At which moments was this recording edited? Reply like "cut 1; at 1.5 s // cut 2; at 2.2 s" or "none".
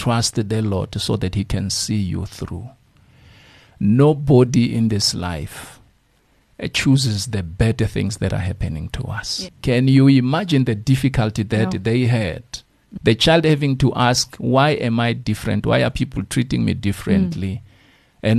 cut 1; at 9.5 s // cut 2; at 13.0 s